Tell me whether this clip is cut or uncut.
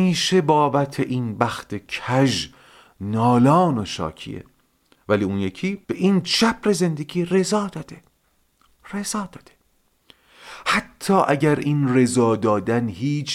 cut